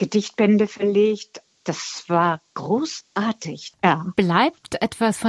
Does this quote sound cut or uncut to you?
cut